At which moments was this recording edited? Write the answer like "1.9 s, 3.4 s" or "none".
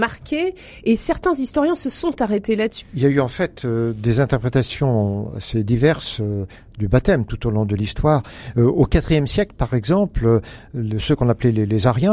2.8 s